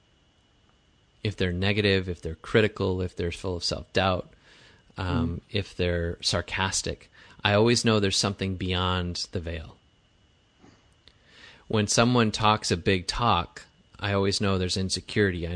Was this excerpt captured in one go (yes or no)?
yes